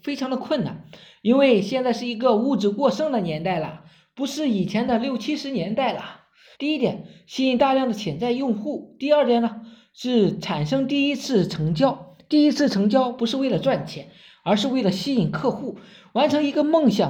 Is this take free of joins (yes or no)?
no